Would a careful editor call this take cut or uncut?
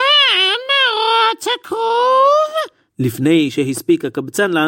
cut